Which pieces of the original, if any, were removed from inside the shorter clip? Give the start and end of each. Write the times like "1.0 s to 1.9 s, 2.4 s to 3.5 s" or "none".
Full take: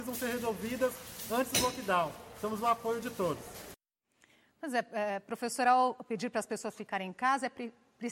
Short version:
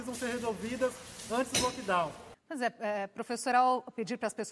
2.3 s to 4.5 s